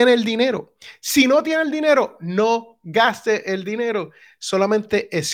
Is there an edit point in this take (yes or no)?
no